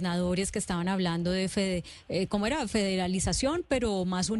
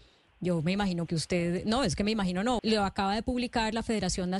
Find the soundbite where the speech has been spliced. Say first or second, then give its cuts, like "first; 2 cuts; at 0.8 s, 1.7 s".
second; 2 cuts; at 1.1 s, 2.6 s